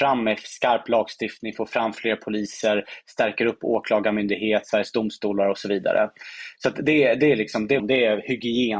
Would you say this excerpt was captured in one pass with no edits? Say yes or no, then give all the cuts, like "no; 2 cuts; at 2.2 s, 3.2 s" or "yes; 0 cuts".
no; 1 cut; at 7.8 s